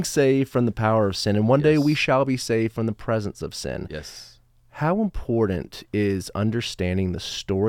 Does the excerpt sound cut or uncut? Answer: uncut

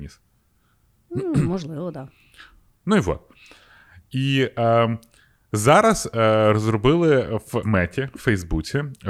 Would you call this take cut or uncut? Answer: cut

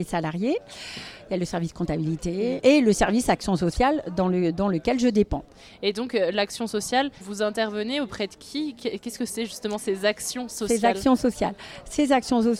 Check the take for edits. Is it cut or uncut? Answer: cut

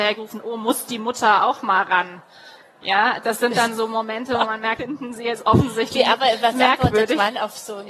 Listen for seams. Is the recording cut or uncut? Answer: cut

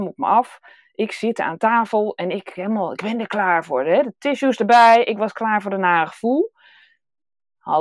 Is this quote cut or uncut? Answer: uncut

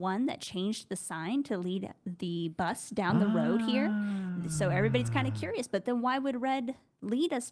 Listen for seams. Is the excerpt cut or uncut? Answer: uncut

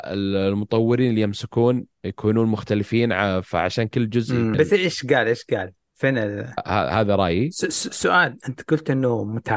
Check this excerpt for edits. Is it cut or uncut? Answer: cut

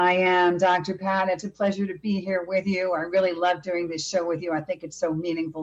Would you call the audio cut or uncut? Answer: cut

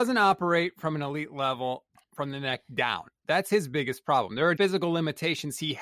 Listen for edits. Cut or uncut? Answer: cut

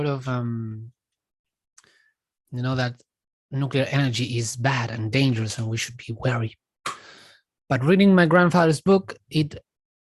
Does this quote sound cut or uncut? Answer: cut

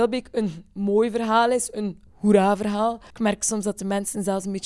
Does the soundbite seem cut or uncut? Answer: cut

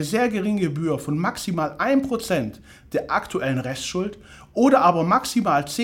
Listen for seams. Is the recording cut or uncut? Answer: uncut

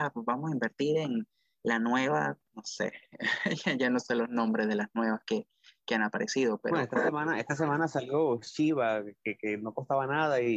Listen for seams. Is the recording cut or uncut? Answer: cut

